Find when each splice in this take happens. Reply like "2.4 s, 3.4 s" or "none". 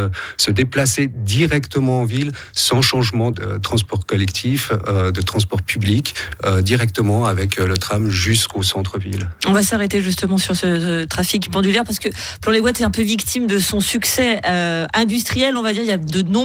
3.3 s